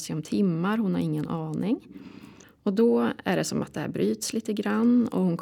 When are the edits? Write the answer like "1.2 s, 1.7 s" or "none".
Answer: 2.4 s